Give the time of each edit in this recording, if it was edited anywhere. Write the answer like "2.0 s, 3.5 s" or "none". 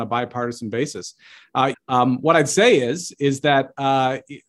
1.7 s